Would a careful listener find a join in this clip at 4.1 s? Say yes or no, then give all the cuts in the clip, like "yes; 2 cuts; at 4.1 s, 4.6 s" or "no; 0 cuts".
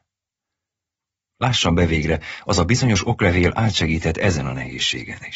no; 1 cut; at 1.3 s